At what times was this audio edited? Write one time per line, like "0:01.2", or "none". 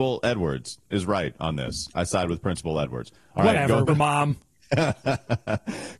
0:03.9